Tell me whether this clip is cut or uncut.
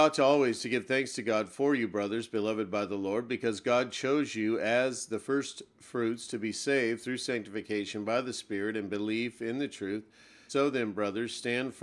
cut